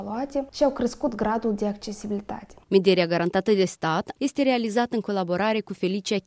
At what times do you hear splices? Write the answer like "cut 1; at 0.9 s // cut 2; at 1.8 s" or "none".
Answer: cut 1; at 2.6 s // cut 2; at 4.2 s